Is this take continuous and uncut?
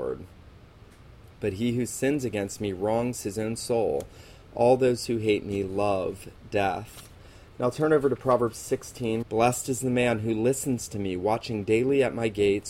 no; 1 cut; at 9.2 s

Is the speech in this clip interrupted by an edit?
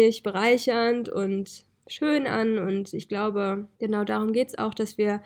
yes; 1 cut; at 3.7 s

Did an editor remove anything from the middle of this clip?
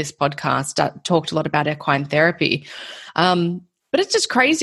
no; 0 cuts

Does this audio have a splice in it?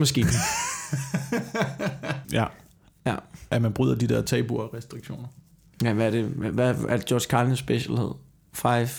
yes; 1 cut; at 2.2 s

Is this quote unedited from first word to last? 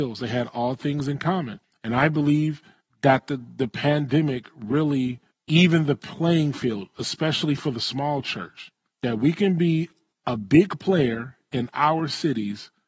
yes; 0 cuts

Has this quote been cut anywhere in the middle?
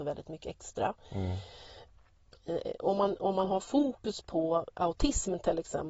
yes; 1 cut; at 4.7 s

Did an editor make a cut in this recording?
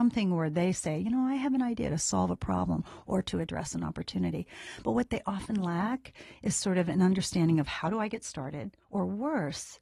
no; 0 cuts

